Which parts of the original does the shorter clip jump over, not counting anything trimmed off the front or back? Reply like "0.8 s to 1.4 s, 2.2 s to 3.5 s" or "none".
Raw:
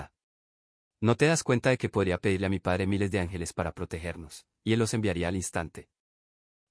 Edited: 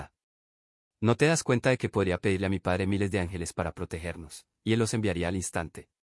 none